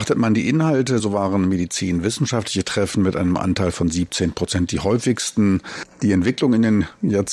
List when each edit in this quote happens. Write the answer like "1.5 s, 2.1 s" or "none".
none